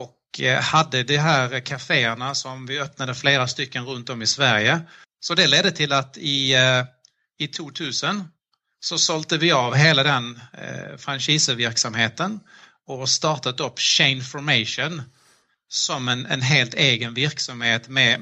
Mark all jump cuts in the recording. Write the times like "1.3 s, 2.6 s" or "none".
5.0 s